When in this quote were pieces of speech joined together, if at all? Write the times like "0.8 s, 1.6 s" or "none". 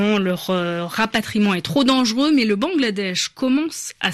none